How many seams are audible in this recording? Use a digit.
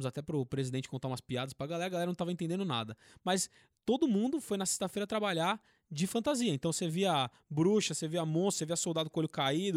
0